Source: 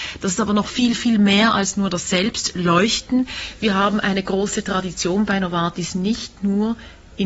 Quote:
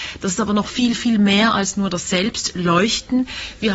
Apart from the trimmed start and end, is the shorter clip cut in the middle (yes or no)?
no